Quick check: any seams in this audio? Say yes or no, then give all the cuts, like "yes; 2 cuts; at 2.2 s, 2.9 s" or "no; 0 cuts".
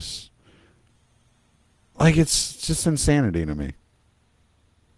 no; 0 cuts